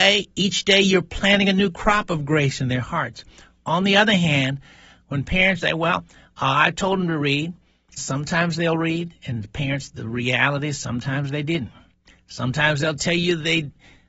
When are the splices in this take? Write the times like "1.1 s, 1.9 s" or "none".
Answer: 5.6 s, 8.0 s